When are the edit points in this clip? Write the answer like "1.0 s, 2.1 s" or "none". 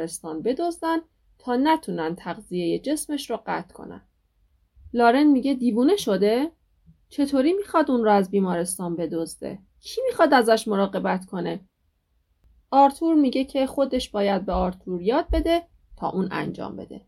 9.7 s